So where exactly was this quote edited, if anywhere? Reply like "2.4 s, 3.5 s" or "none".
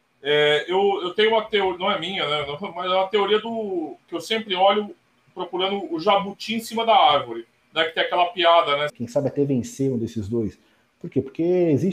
8.9 s